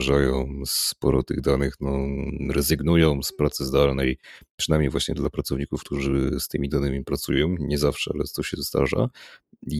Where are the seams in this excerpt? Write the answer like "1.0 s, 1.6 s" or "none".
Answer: none